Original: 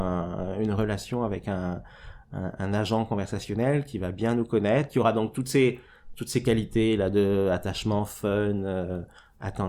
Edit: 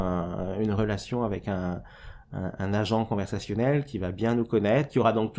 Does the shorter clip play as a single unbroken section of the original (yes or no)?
yes